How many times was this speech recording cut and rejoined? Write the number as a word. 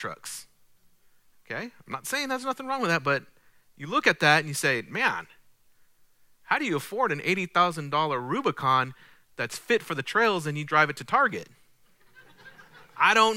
one